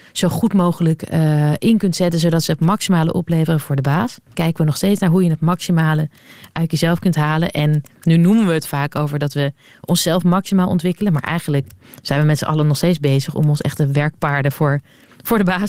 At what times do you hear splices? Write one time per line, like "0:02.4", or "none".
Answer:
0:04.3

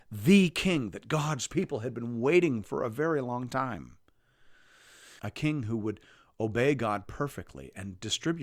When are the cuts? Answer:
0:02.6
0:05.2

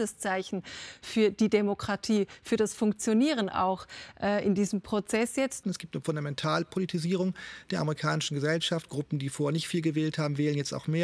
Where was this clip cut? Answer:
0:05.6

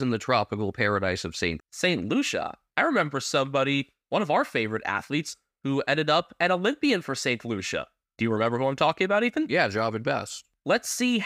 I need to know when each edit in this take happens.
0:01.6

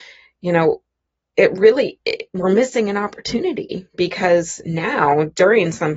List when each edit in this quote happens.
none

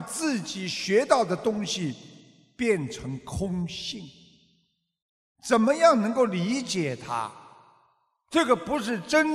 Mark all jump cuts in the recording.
none

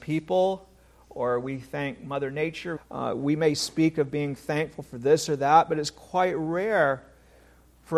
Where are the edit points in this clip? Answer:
0:02.8

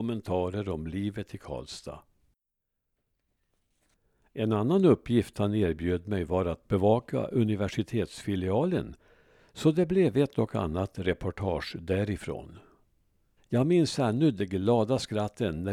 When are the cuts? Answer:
0:13.4

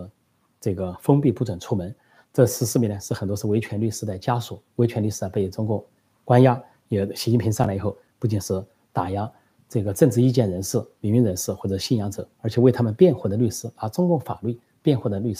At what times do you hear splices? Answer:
none

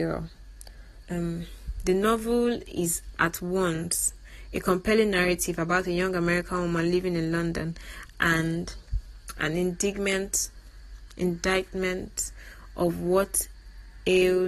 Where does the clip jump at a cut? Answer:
0:01.0

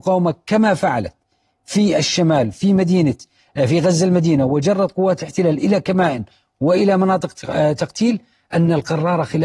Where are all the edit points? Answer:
none

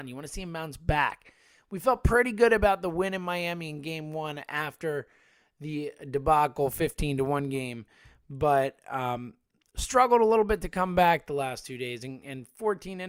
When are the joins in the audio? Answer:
none

